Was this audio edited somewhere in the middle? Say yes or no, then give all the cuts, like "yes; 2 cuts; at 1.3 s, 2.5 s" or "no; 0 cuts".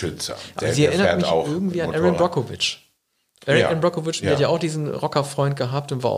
no; 0 cuts